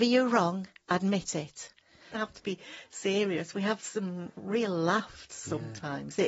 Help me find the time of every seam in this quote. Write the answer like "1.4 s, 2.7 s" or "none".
2.1 s